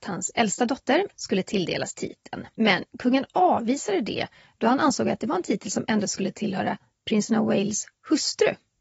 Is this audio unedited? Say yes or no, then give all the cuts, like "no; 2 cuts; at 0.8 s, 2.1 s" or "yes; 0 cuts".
no; 2 cuts; at 1.1 s, 2.5 s